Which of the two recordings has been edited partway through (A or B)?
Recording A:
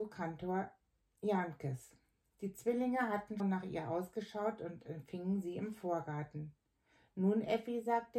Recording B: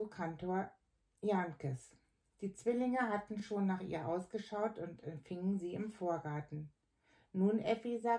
A